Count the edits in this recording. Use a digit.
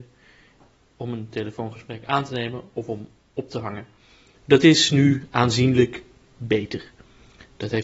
1